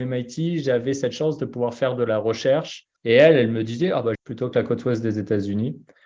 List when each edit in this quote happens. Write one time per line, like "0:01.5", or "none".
0:03.0
0:04.1